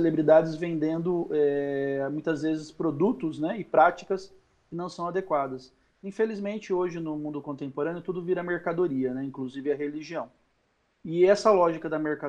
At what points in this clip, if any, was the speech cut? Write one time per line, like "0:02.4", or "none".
none